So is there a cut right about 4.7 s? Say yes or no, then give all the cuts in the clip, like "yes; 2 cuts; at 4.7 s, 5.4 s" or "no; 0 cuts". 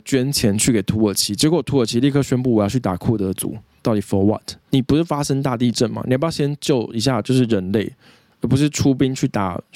yes; 1 cut; at 4.7 s